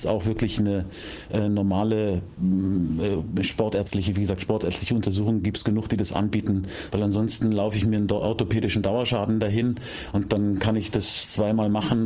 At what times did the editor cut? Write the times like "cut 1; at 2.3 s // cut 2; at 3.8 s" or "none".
cut 1; at 6.9 s